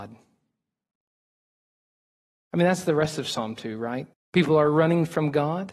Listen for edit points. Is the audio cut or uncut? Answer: cut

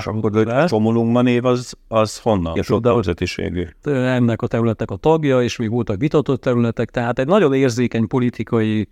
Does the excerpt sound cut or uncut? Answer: cut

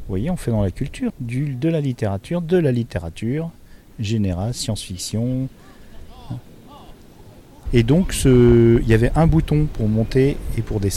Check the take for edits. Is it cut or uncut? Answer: cut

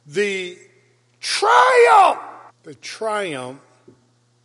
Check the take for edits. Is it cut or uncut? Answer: cut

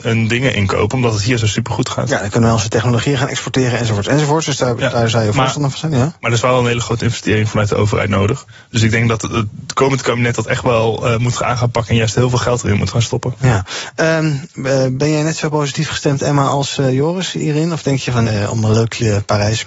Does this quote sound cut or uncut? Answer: cut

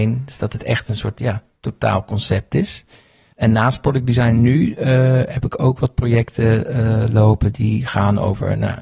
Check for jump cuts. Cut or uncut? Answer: uncut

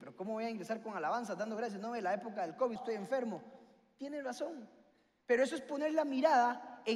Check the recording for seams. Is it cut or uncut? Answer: cut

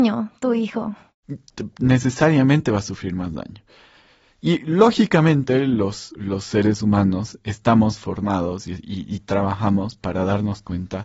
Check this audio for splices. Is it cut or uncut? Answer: uncut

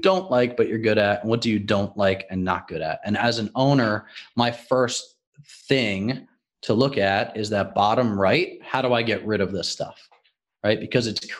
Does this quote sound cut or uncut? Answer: uncut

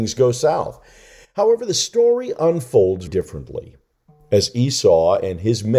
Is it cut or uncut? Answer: cut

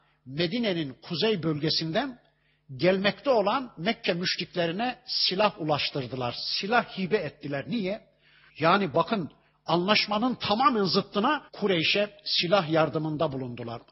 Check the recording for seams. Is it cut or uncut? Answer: cut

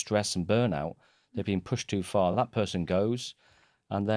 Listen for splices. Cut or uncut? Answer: uncut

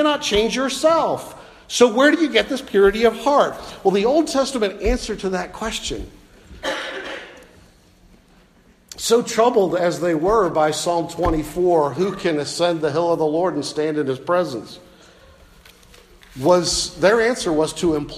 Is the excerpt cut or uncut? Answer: uncut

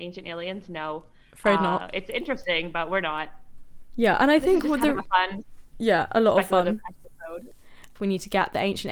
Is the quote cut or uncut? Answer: cut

